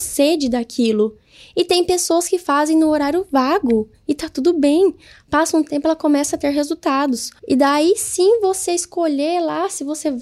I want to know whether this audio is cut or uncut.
cut